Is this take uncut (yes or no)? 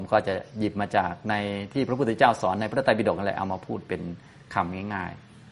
yes